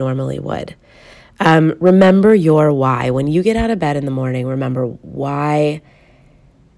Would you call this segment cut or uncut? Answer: uncut